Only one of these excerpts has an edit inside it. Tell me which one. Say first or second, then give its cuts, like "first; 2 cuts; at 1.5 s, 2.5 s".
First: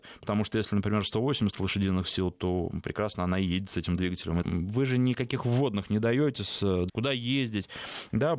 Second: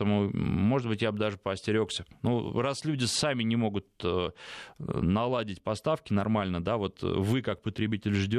first; 2 cuts; at 4.4 s, 6.9 s